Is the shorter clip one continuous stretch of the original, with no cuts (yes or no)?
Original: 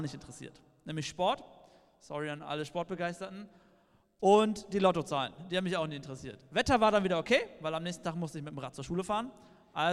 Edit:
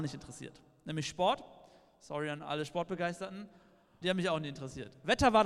no